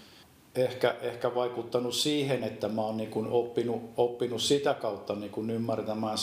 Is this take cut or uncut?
uncut